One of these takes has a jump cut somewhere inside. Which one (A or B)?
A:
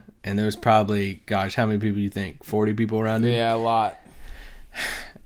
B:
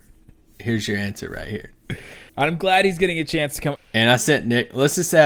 B